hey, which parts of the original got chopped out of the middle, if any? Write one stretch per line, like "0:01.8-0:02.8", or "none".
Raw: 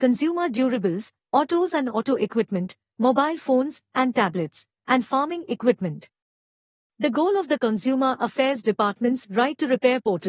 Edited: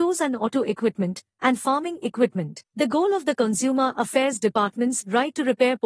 0:02.9-0:04.8
0:06.1-0:06.9